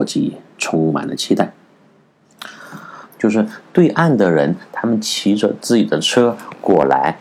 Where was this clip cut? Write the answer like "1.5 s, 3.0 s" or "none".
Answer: 3.0 s